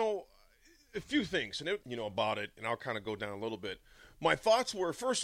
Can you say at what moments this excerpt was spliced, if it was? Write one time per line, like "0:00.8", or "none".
0:01.8